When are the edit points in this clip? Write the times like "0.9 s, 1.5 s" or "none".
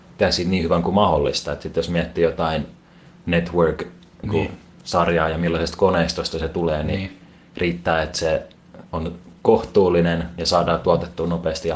4.2 s, 8.9 s